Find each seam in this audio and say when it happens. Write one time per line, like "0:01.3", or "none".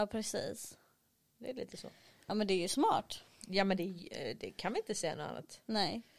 none